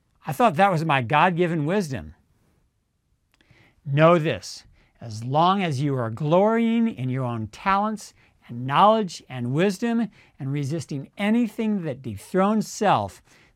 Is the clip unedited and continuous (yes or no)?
yes